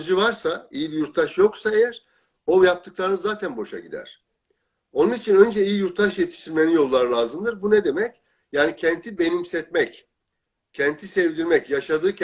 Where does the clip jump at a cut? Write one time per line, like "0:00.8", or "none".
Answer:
none